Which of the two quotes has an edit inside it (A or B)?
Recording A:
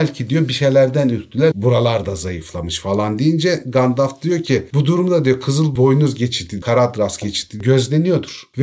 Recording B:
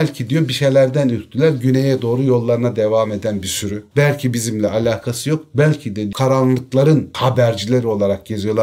A